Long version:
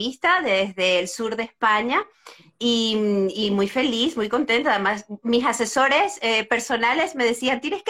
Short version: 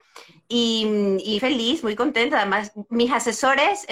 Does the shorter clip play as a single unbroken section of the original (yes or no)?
no